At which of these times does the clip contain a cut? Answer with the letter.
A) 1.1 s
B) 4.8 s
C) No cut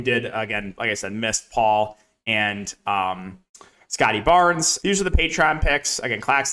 B